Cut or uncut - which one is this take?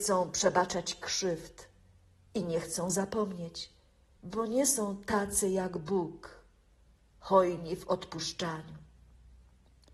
cut